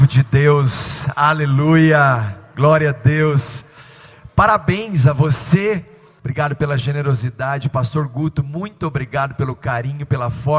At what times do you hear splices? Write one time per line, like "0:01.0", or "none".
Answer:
0:06.2